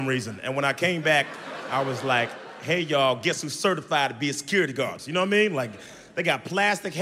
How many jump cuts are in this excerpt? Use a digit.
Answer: 1